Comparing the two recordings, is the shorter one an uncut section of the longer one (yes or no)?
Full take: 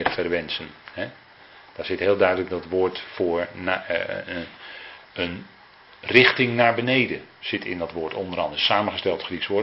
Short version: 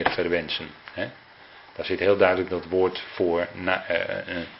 yes